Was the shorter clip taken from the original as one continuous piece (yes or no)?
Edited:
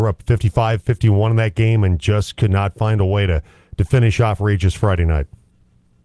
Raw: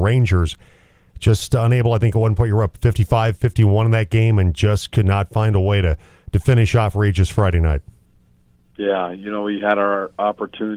yes